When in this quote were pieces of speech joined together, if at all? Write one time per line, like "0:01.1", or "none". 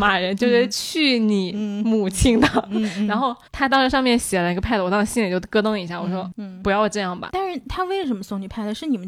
0:03.5
0:07.3